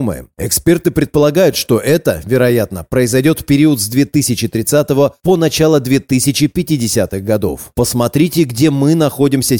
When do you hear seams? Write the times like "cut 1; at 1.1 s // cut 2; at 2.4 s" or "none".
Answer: none